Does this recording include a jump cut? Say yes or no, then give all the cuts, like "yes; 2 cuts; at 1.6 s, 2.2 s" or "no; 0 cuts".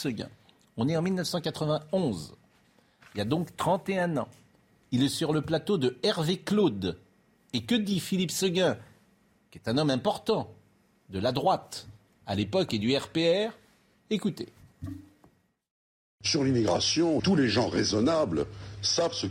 yes; 1 cut; at 17.2 s